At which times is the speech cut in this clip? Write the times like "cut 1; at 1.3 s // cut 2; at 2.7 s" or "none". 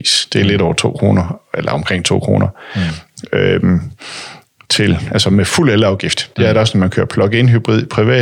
cut 1; at 6.3 s